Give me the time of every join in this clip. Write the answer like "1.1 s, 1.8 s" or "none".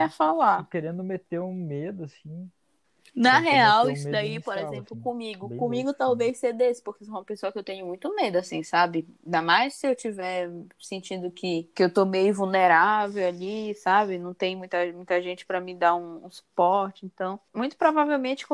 none